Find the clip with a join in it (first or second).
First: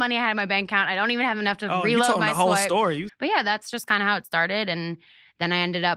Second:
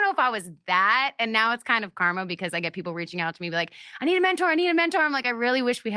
first